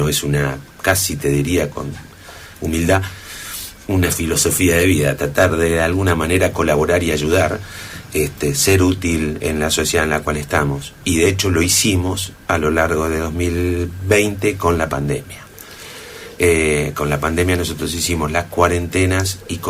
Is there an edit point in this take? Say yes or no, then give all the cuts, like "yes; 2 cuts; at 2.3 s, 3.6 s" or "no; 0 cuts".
no; 0 cuts